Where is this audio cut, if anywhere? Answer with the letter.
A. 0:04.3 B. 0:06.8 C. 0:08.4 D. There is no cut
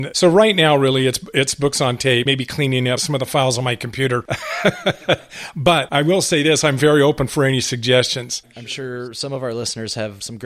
C